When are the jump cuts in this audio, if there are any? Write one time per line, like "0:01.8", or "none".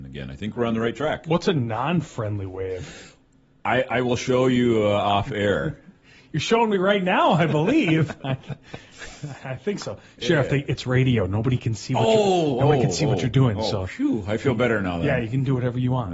none